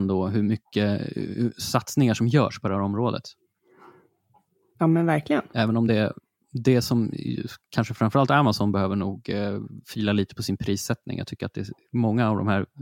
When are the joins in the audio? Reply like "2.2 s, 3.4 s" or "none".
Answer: none